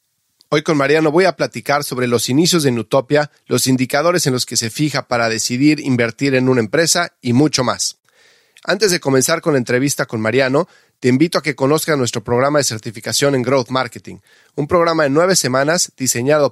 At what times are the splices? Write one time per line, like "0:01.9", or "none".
0:03.4